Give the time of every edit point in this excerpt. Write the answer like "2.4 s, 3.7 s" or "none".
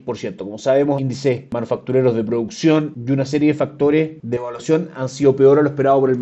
1.0 s